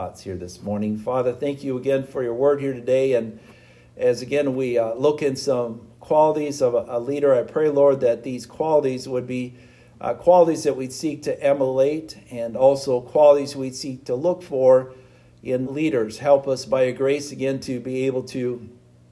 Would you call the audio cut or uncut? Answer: cut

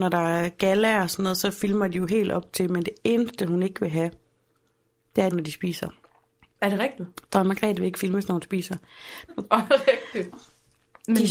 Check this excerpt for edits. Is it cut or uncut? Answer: cut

